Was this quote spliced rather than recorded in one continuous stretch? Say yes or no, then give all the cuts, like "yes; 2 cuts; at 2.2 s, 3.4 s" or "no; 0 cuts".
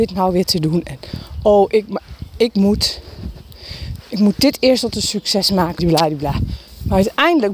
yes; 1 cut; at 5.8 s